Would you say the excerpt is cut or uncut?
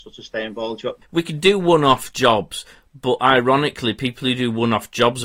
cut